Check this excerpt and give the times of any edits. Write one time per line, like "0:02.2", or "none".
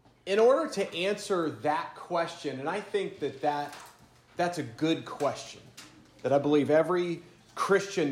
none

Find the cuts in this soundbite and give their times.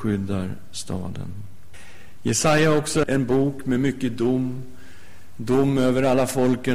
0:03.0

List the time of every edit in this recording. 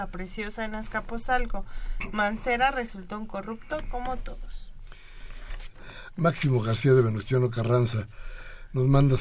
0:05.5

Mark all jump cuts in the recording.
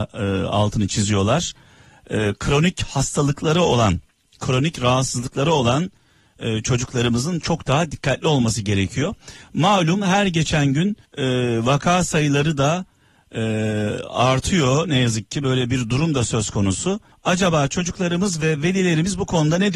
0:11.1
0:17.1

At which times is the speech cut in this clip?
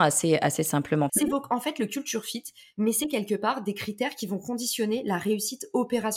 0:01.1
0:02.7

